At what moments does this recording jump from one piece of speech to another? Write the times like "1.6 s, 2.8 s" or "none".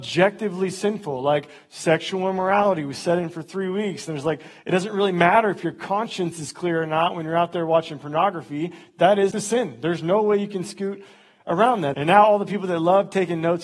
9.3 s, 11.9 s